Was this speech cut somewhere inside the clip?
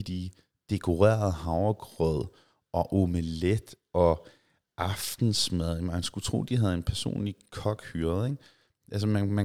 no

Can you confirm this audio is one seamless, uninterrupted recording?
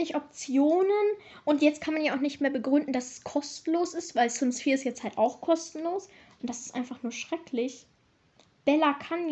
yes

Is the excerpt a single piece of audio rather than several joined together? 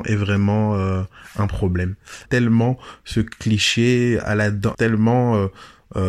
no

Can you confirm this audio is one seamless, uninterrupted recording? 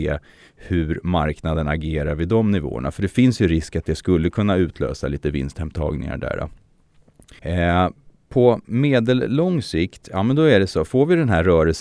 no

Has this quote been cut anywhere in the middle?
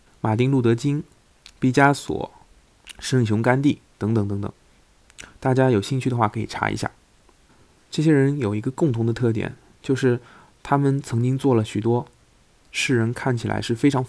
no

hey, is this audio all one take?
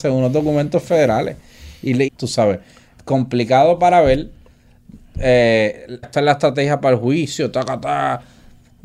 no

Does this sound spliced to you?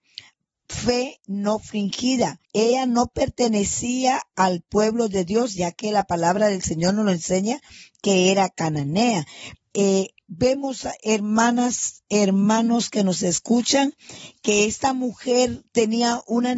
yes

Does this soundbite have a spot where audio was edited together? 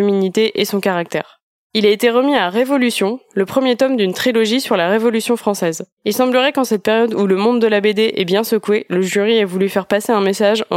yes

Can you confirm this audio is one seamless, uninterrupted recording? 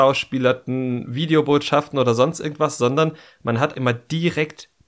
no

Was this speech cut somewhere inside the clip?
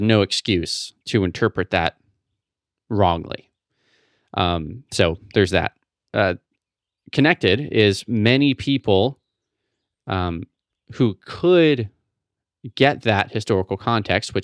no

